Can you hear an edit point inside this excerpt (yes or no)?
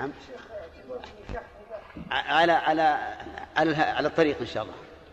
no